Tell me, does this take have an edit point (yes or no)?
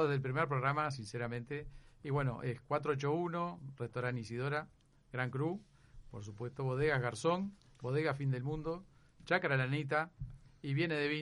no